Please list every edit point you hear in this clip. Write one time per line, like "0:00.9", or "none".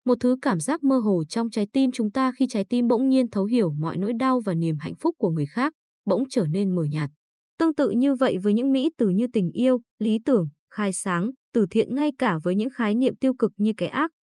0:07.5